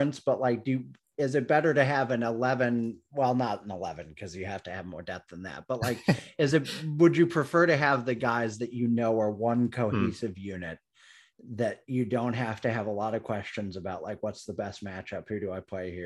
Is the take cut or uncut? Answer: uncut